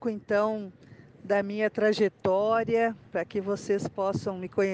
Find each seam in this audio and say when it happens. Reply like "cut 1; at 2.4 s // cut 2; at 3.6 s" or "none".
none

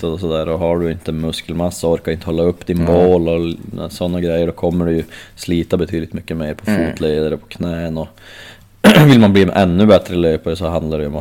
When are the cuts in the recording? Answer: none

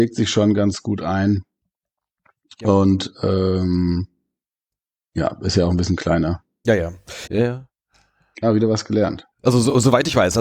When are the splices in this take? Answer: cut 1; at 7.3 s

